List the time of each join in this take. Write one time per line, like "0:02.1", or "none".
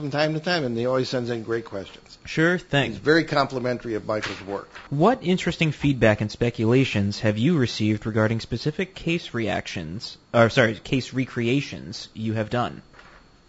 0:04.9